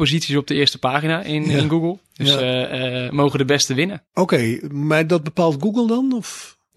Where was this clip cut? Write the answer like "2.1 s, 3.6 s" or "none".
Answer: 4.1 s